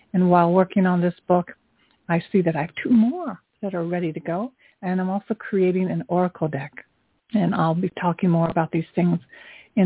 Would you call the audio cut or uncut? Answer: uncut